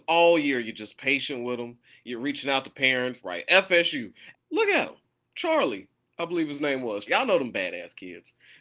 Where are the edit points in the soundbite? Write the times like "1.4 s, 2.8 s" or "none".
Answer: 3.2 s, 4.3 s, 7.1 s